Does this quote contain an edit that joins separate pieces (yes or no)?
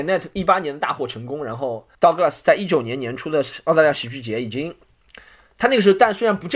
yes